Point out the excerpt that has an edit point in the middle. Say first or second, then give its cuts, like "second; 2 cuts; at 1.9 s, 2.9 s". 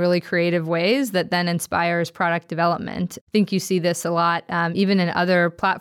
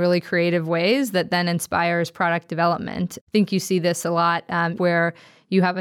second; 1 cut; at 4.7 s